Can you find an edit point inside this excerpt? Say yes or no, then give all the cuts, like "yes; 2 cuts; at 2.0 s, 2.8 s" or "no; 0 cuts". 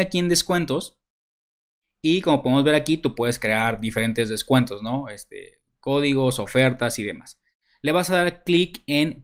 no; 0 cuts